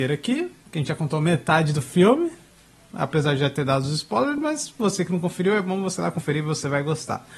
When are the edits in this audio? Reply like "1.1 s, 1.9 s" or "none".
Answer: none